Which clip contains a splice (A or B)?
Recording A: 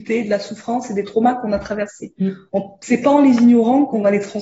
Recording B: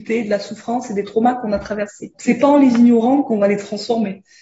B